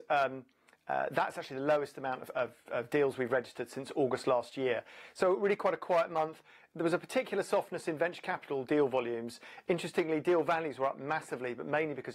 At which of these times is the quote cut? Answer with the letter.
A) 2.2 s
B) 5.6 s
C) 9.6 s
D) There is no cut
A